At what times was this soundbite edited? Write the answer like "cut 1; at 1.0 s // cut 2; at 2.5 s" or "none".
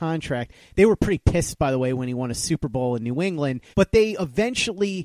cut 1; at 3.7 s